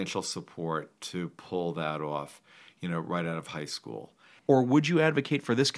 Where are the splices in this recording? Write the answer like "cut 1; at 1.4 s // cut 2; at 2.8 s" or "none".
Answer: cut 1; at 4.4 s

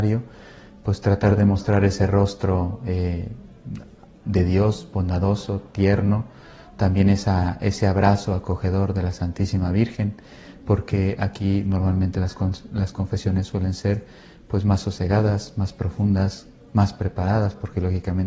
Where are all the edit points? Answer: none

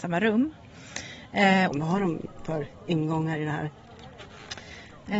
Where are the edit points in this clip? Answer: cut 1; at 1.7 s

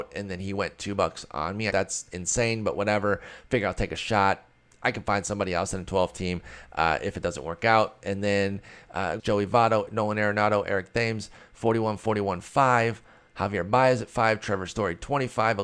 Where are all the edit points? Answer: cut 1; at 1.7 s // cut 2; at 9.2 s

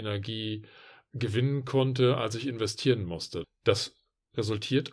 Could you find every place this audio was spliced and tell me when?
cut 1; at 3.4 s

